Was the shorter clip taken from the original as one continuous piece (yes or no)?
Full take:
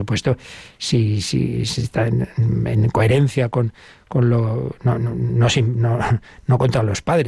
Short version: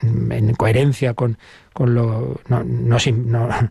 no